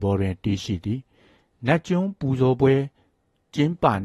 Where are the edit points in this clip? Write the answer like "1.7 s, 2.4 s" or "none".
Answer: none